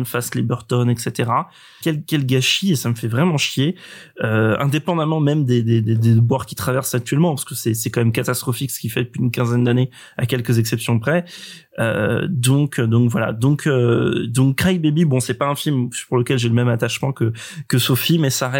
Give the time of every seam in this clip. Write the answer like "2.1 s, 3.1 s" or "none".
1.8 s